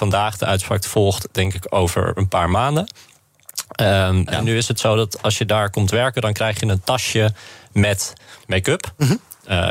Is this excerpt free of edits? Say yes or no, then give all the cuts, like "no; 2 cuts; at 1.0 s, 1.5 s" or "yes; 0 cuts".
no; 2 cuts; at 4.3 s, 8.4 s